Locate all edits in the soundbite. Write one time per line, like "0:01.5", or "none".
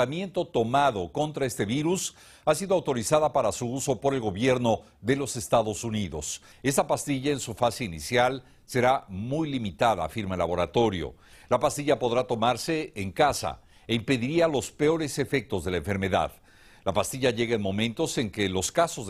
0:06.5
0:11.3